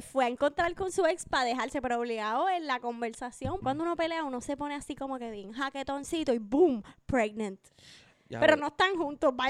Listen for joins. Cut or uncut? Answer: cut